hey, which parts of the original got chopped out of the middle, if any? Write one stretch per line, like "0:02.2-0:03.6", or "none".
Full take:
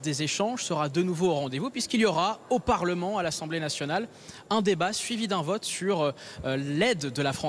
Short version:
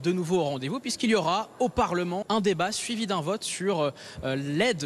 0:03.1-0:04.4